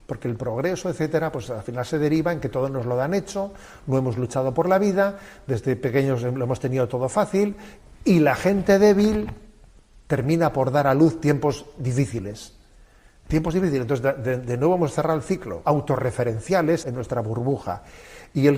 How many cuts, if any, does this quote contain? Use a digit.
2